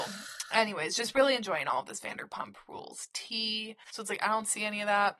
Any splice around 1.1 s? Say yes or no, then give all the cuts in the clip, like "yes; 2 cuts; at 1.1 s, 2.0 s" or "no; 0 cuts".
no; 1 cut; at 3.8 s